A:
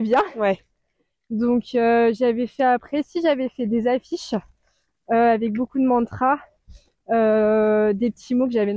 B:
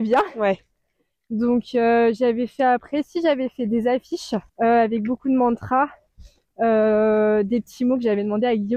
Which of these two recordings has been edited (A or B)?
B